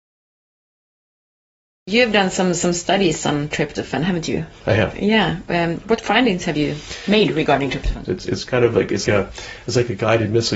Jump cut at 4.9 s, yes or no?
no